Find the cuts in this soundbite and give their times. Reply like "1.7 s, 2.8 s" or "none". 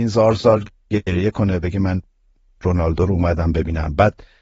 none